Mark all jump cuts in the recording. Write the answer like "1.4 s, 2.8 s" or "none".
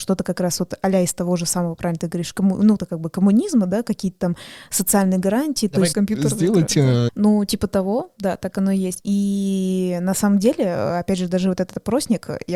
5.9 s, 7.1 s, 9.0 s